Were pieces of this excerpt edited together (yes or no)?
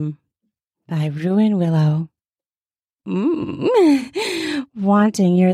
yes